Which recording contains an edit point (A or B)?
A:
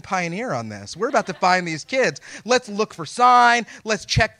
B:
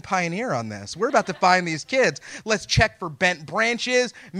B